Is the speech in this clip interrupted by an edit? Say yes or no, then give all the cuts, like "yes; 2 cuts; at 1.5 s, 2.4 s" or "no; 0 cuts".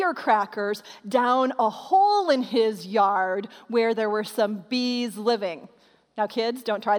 no; 0 cuts